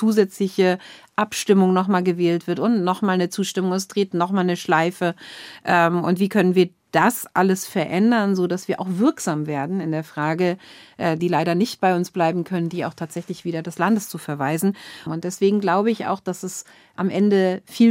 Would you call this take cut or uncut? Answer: cut